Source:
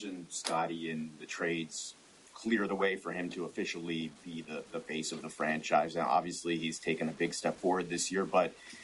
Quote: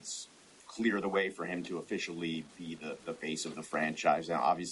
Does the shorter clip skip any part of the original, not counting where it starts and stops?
no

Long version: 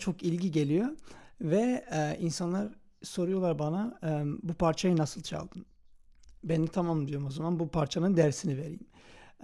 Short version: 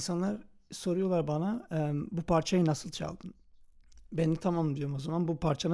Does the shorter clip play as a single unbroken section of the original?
yes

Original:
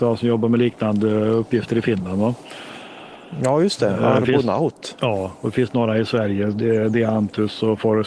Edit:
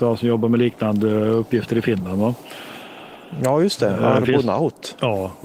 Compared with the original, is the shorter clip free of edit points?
yes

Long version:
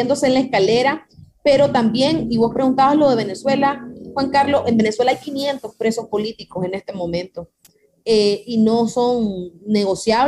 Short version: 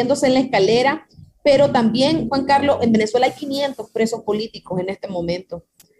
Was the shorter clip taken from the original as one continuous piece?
no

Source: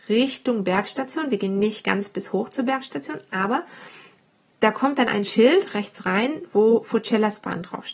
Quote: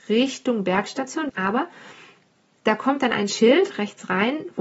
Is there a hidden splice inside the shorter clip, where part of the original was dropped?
yes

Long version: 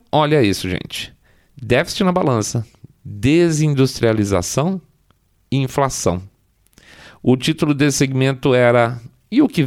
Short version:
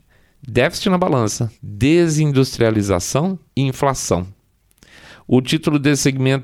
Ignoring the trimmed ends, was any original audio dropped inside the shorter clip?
yes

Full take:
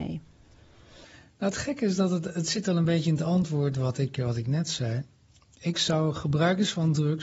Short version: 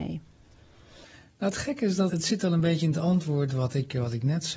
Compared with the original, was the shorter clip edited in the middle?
yes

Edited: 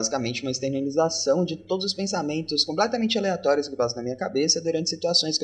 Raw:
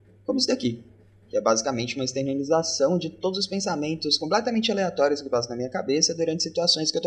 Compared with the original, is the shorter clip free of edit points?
yes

